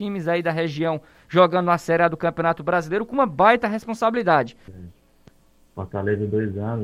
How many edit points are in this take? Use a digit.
1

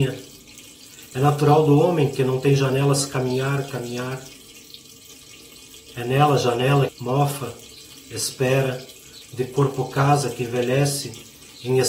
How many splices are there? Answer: 2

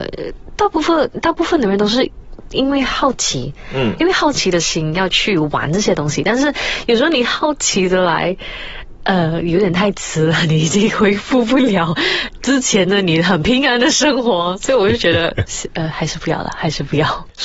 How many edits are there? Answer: 0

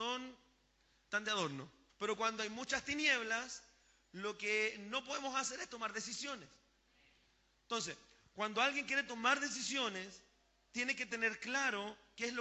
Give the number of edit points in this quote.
1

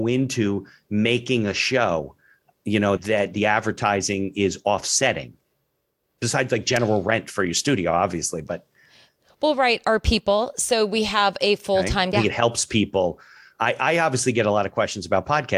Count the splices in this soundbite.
2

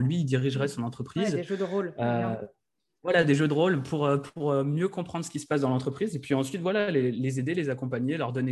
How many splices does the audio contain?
0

